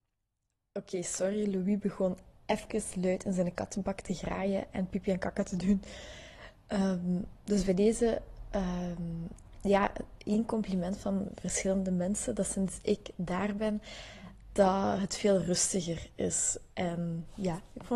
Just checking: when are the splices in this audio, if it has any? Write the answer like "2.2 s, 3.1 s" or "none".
none